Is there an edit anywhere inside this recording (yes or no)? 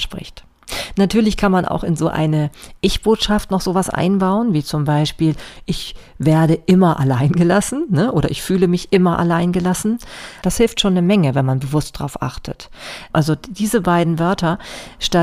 yes